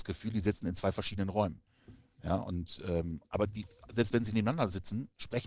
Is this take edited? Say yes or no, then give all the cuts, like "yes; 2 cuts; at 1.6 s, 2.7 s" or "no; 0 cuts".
yes; 1 cut; at 3.2 s